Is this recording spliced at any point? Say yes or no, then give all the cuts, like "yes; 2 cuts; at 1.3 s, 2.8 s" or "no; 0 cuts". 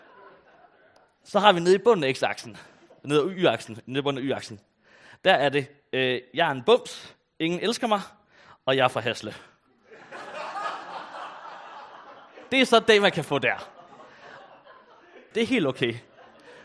yes; 1 cut; at 15.3 s